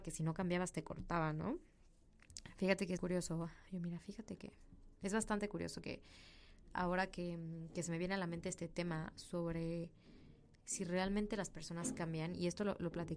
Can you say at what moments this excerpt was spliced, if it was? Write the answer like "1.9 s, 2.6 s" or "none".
3.0 s